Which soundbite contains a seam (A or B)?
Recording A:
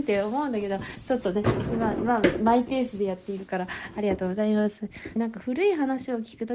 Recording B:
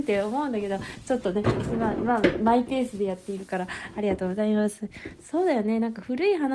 A